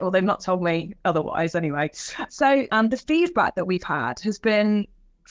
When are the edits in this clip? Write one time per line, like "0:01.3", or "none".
0:02.7